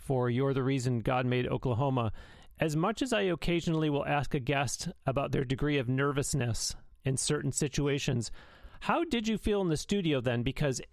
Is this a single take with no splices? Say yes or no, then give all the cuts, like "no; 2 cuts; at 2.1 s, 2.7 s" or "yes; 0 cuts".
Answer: no; 1 cut; at 2.5 s